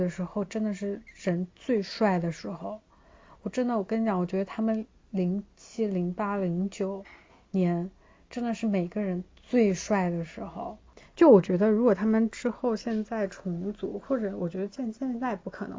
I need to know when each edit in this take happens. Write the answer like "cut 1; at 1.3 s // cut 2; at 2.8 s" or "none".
none